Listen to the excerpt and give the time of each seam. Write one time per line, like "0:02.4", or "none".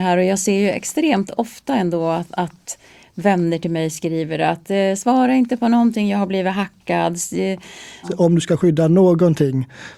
0:08.0